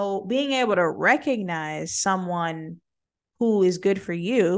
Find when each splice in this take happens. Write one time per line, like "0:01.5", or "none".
none